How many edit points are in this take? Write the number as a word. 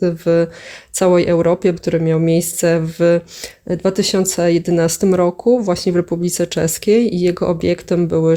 one